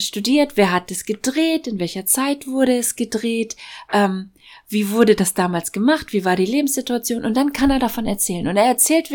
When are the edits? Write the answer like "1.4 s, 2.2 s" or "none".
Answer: none